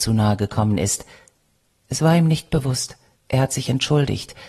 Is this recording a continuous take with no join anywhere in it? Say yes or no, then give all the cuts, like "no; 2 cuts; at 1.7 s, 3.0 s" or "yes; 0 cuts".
no; 1 cut; at 3.2 s